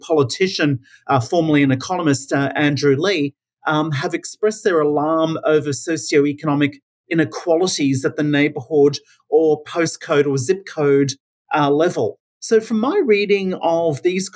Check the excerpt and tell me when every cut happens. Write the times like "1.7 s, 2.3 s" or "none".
12.3 s